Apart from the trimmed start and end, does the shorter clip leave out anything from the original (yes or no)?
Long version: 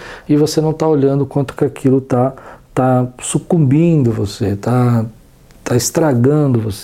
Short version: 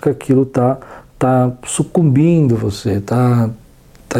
no